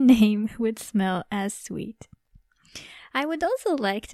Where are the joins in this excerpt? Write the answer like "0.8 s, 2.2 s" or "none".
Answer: none